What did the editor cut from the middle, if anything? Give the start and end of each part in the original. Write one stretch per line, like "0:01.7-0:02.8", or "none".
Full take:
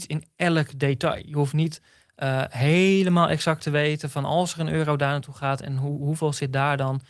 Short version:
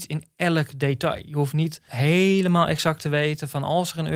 0:01.9-0:02.5